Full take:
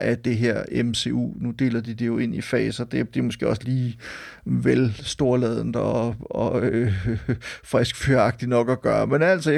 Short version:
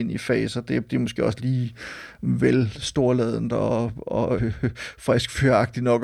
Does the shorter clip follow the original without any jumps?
no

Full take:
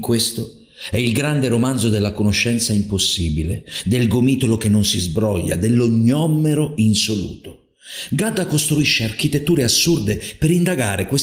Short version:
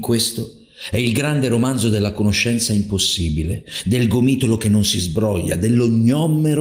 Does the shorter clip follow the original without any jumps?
yes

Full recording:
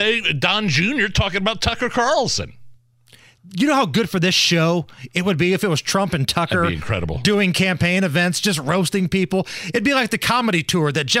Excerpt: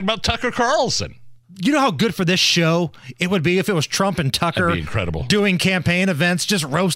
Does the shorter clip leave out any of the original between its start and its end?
yes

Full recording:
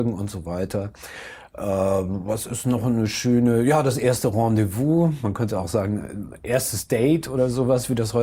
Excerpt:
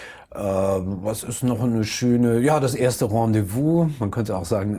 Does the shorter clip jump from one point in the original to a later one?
no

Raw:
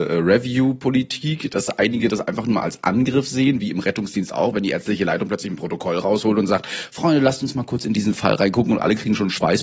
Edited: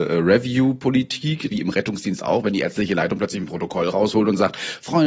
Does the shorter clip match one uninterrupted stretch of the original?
no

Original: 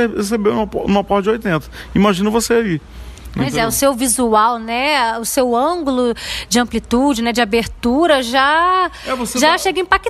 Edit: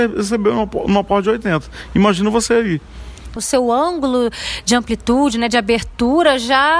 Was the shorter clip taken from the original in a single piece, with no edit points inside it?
no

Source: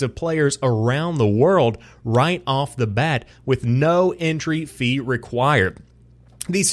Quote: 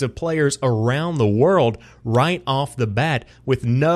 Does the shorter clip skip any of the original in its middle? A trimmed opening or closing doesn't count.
no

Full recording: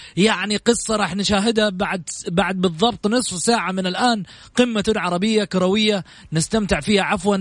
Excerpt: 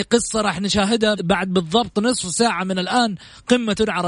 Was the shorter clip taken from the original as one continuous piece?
no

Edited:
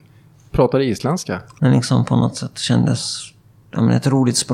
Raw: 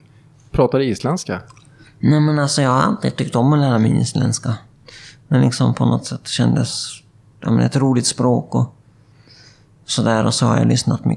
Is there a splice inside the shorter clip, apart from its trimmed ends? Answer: yes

